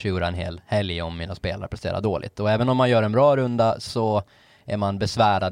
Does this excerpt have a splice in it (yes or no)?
no